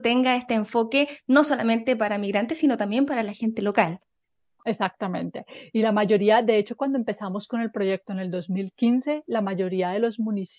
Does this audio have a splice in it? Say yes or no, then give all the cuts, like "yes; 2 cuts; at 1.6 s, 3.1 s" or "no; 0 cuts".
no; 0 cuts